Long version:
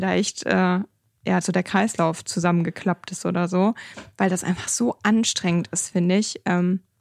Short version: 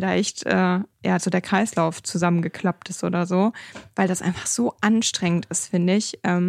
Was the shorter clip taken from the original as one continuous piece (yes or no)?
no